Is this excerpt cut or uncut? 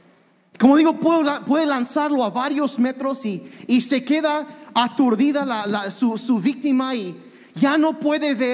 uncut